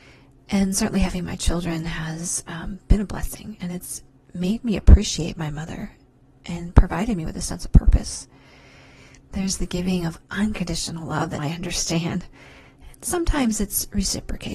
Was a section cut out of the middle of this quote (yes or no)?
yes